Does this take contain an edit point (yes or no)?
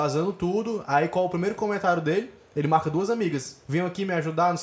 no